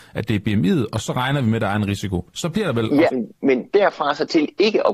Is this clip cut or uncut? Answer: cut